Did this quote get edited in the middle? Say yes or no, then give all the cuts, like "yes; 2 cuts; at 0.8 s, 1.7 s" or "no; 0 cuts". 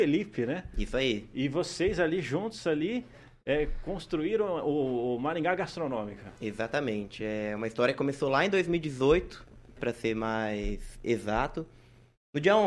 yes; 1 cut; at 9.8 s